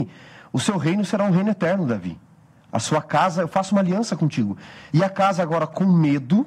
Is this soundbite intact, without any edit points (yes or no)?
no